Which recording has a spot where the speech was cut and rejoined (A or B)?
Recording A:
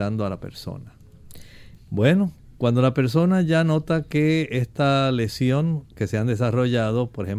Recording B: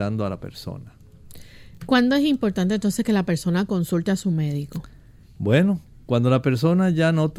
A